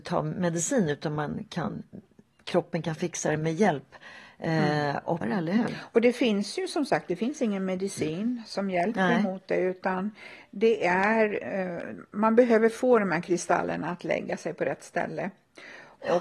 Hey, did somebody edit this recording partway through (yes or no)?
yes